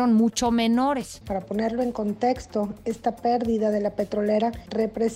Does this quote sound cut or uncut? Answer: cut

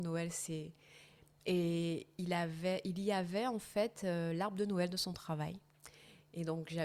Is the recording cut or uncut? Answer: uncut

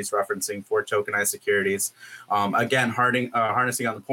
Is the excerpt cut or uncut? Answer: uncut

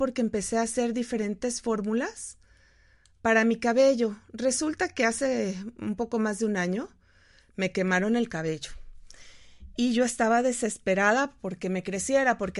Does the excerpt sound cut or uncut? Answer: uncut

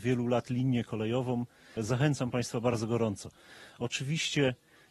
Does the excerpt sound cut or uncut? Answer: cut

